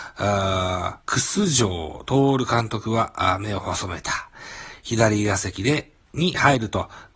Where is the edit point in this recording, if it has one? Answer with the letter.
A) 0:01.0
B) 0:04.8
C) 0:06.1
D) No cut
A